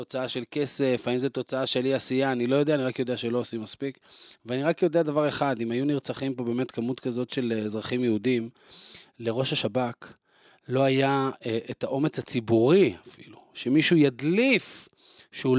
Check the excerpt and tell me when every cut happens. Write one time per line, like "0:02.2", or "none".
none